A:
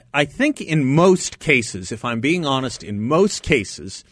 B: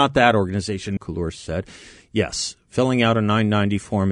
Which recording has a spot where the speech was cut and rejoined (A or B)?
B